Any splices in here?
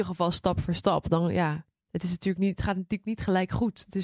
no; 0 cuts

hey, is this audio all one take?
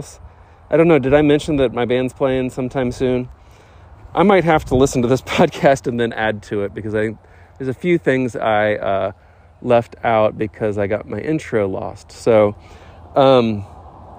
yes; 0 cuts

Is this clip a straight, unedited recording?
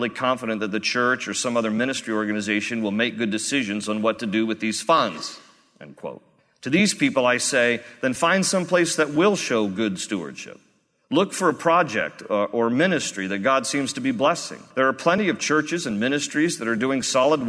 no; 1 cut; at 14.7 s

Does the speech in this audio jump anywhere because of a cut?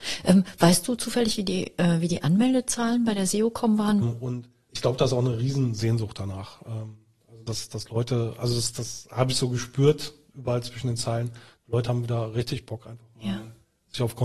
yes; 1 cut; at 4.0 s

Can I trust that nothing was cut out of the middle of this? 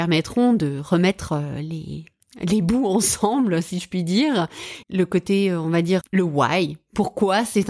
no; 2 cuts; at 4.8 s, 6.0 s

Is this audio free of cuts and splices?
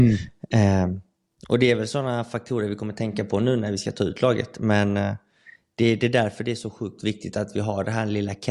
yes; 0 cuts

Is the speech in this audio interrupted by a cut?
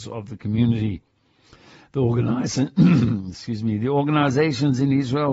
no; 0 cuts

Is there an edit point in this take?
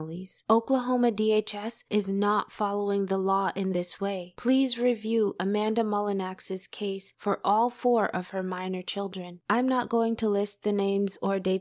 no; 0 cuts

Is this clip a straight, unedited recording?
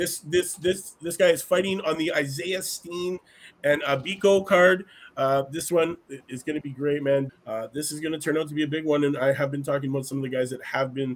no; 1 cut; at 7.3 s

